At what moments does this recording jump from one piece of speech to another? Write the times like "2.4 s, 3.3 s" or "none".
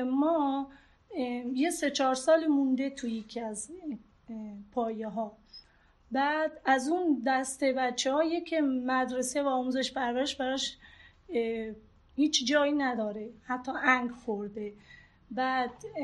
none